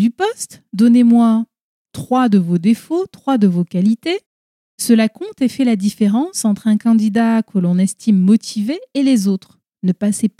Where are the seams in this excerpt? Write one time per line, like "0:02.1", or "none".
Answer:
none